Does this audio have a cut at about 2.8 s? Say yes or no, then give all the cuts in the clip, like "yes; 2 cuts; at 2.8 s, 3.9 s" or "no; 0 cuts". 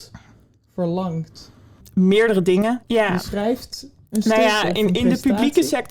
yes; 1 cut; at 2.8 s